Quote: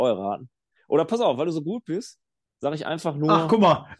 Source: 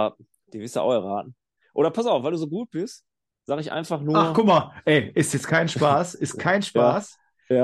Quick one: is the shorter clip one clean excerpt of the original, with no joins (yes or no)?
yes